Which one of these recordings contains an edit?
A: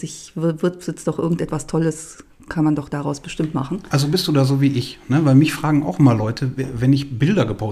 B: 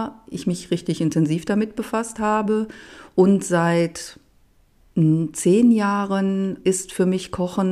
B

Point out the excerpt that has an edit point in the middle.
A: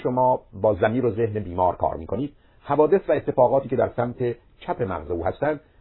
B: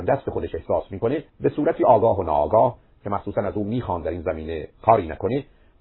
B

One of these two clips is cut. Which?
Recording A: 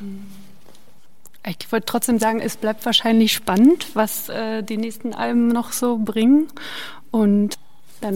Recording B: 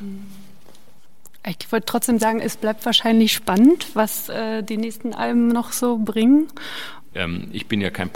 B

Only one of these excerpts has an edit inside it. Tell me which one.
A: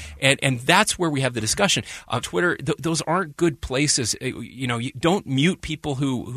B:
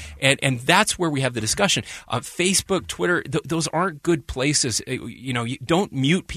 A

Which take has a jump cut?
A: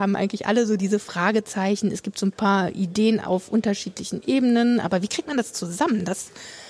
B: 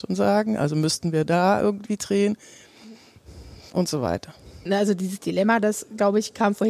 B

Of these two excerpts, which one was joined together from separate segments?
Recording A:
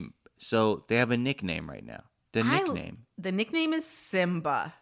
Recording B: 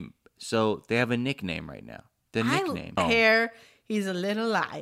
B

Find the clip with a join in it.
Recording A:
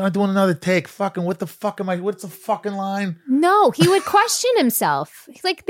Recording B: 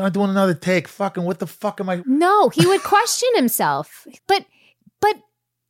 B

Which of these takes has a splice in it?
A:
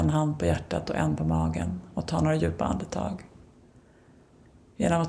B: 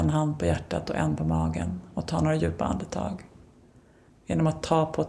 B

